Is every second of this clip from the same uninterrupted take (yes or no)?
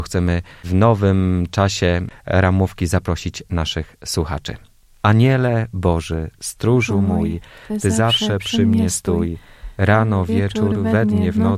yes